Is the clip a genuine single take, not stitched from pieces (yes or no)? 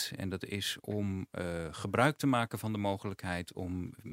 yes